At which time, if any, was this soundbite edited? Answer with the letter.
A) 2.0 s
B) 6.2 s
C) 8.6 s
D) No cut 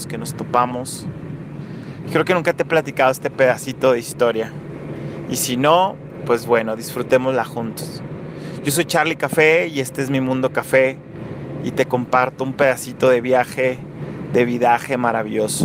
A